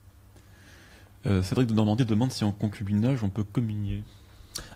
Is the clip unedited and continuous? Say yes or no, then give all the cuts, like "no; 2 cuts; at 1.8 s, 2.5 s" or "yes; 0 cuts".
yes; 0 cuts